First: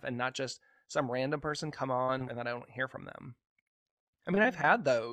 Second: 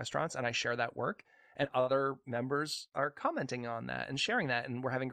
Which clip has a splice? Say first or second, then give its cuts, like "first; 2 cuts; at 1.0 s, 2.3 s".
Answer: first; 1 cut; at 2.3 s